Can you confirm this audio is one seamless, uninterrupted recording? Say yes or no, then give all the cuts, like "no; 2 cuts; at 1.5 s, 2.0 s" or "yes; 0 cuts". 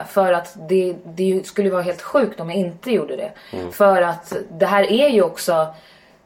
yes; 0 cuts